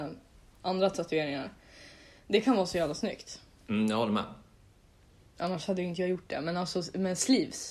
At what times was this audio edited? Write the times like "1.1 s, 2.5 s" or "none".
none